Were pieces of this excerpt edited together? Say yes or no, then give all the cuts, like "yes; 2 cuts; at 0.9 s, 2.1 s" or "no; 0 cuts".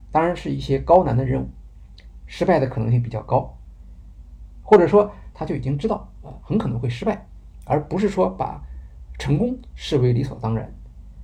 yes; 1 cut; at 5.3 s